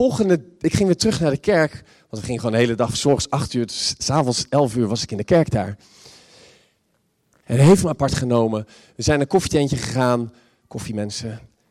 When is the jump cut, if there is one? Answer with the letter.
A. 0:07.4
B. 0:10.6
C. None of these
A